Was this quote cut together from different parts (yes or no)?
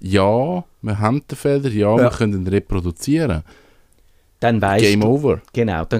no